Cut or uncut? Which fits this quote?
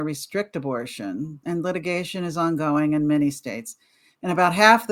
cut